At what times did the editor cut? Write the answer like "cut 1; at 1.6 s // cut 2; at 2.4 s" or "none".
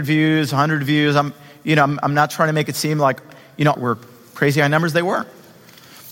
cut 1; at 3.7 s